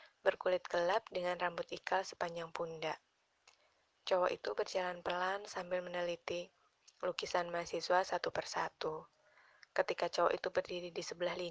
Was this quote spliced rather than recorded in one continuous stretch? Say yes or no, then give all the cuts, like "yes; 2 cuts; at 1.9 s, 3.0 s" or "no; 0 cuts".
no; 0 cuts